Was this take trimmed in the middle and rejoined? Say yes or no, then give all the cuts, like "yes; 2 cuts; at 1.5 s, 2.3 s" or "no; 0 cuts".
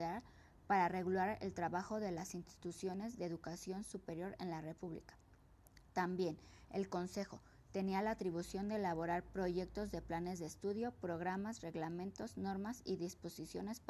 no; 0 cuts